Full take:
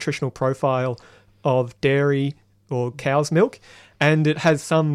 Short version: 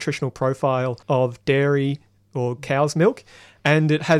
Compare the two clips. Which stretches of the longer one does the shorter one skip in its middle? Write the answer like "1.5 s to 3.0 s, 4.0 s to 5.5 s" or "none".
1.0 s to 1.4 s